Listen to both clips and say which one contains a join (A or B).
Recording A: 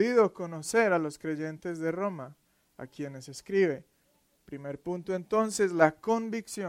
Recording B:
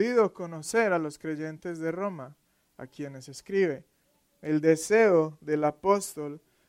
A